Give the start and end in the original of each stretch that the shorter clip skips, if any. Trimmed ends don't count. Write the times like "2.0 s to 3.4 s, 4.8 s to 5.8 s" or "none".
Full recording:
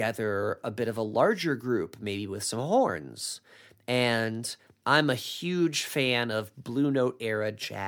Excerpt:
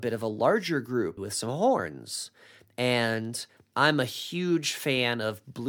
1.9 s to 2.3 s